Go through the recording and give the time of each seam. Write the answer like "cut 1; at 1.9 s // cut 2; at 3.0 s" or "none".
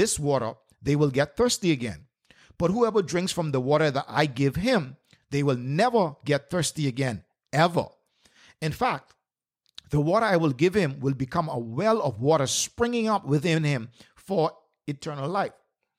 none

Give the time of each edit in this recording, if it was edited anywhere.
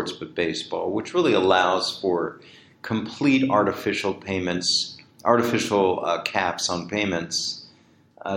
none

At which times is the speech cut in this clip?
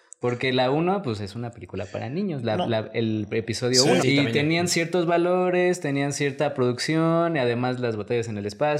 cut 1; at 4.0 s

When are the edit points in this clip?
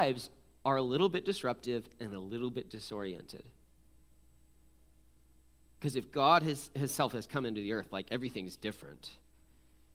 none

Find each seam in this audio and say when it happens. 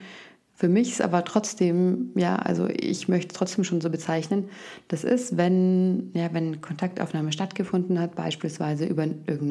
none

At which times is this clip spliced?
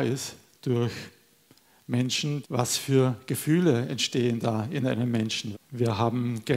cut 1; at 2.4 s // cut 2; at 5.5 s

